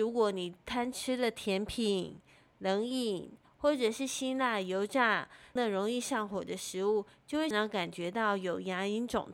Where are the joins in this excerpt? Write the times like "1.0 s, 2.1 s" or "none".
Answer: 5.6 s, 7.5 s